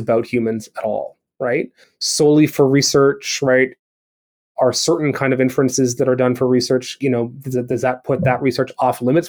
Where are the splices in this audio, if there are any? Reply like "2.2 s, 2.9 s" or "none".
1.8 s